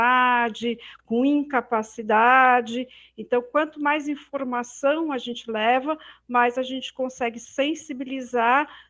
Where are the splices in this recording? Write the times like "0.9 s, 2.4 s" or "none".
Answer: 1.0 s